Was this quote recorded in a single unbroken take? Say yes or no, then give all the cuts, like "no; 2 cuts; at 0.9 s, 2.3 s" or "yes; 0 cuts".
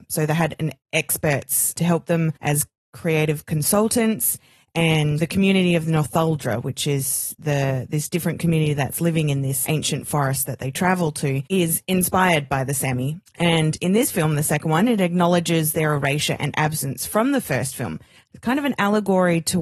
no; 2 cuts; at 2.4 s, 5.2 s